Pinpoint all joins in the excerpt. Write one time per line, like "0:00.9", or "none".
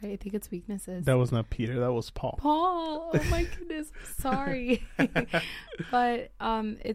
none